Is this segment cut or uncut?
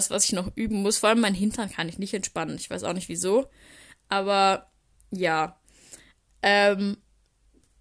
uncut